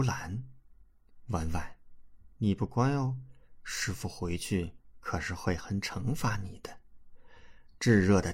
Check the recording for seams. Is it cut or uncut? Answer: cut